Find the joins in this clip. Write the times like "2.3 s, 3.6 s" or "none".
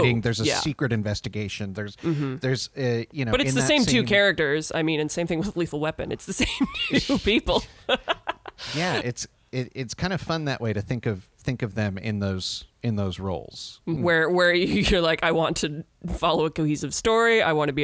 14.0 s